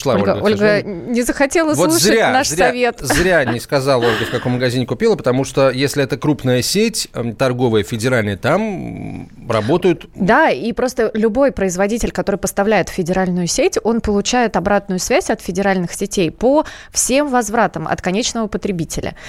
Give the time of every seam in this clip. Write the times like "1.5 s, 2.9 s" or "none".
3.5 s